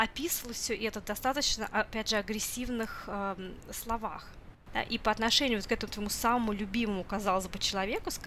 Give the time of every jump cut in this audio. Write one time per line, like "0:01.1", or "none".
none

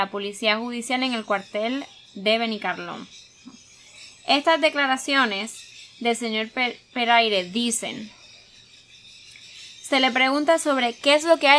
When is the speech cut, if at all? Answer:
none

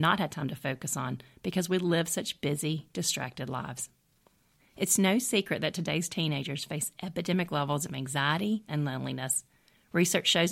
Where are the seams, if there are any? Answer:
0:04.6
0:08.7

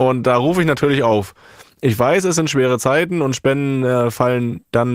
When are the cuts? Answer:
none

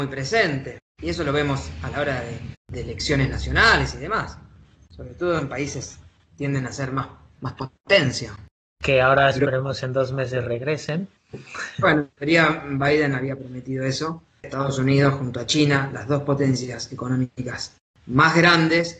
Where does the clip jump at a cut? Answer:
0:08.7
0:14.4

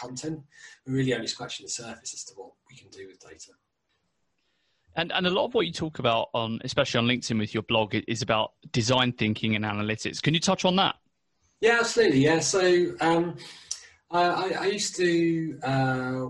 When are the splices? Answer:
none

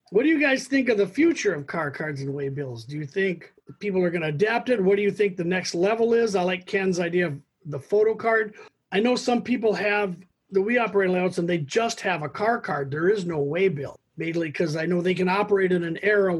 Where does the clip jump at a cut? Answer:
none

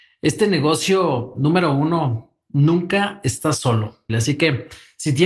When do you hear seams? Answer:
0:04.1

